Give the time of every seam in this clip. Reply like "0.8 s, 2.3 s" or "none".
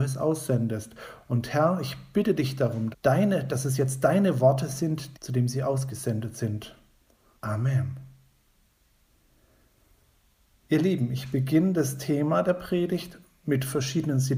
2.9 s, 5.1 s, 7.4 s